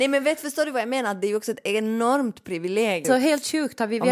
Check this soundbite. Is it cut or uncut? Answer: cut